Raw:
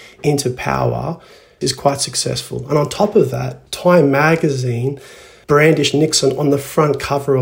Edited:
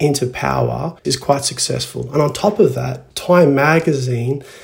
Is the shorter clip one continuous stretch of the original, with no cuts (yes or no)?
no